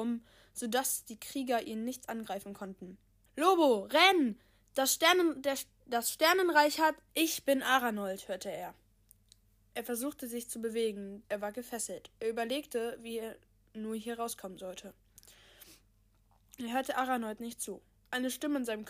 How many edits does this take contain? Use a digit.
3